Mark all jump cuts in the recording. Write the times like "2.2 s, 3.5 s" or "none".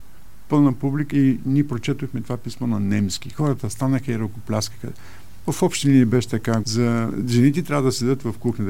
1.1 s, 6.6 s